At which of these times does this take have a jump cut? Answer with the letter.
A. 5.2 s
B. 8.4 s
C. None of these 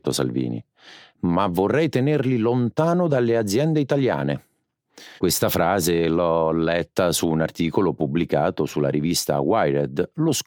A